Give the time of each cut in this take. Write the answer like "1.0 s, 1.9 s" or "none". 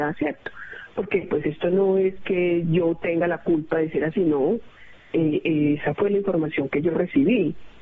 none